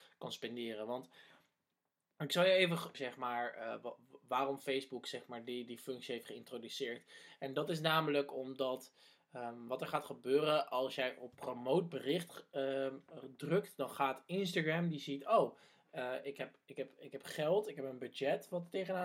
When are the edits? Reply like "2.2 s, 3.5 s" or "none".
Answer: 2.9 s